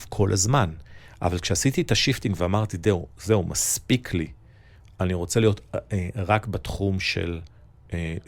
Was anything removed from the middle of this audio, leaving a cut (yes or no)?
no